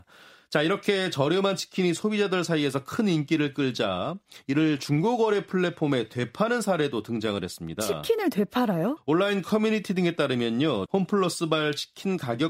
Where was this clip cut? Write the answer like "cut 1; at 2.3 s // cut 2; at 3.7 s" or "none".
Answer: cut 1; at 9.0 s // cut 2; at 10.9 s